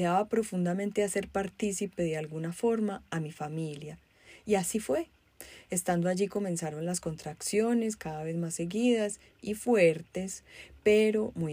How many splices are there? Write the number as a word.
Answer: zero